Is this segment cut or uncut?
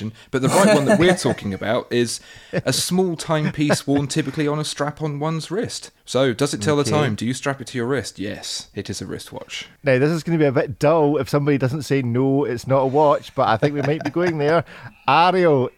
uncut